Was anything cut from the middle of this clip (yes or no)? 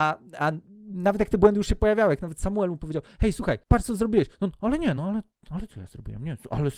no